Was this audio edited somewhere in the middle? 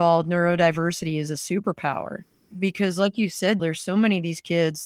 yes; 1 cut; at 3.6 s

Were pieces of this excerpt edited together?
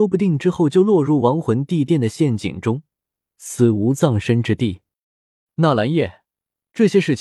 yes; 1 cut; at 5.5 s

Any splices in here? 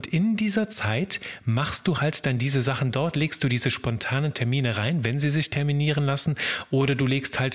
no; 0 cuts

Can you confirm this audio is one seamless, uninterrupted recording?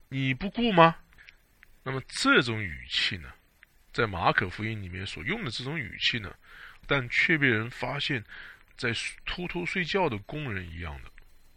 no; 2 cuts; at 6.8 s, 8.7 s

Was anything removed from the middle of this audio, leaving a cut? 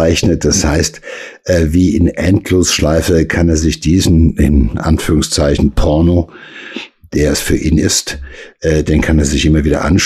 no; 0 cuts

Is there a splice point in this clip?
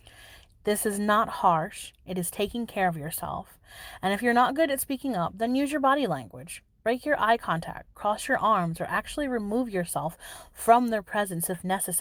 no; 0 cuts

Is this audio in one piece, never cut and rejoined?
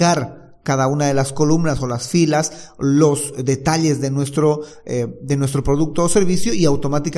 yes; 0 cuts

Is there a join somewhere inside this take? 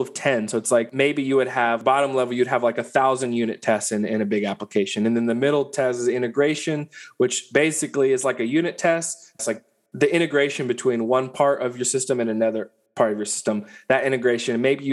yes; 1 cut; at 9.4 s

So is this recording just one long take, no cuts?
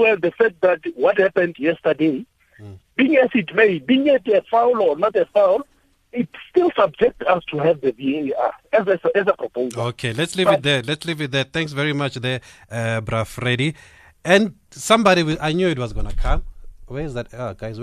yes; 0 cuts

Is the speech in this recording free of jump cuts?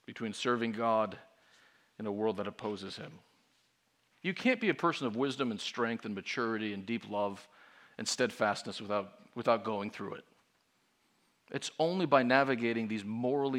no; 1 cut; at 4.1 s

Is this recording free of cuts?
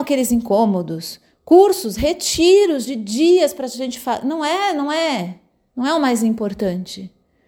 yes; 0 cuts

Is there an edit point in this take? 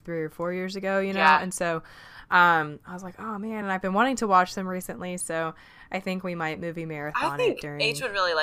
no; 0 cuts

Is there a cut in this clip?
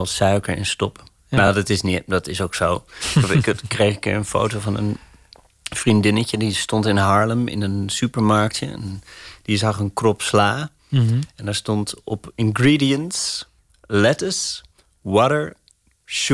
no; 0 cuts

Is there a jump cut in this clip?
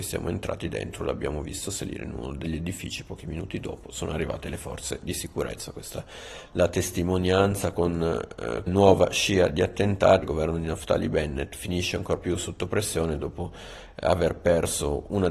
yes; 2 cuts; at 8.7 s, 10.2 s

